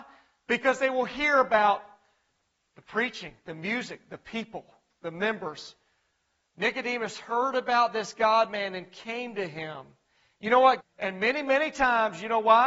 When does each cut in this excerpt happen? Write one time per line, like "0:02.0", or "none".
0:06.5
0:10.8